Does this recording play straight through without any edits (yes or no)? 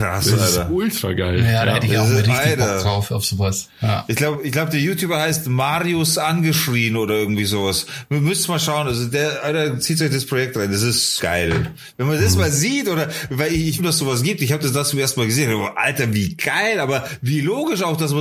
no